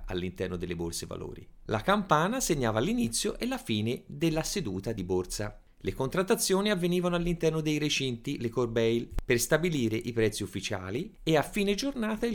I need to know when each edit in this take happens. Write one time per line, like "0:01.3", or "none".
0:01.7

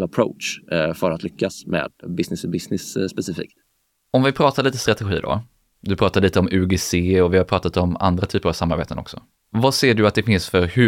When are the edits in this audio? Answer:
none

